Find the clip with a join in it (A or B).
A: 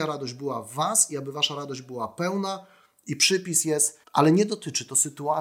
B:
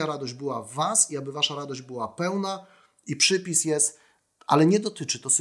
A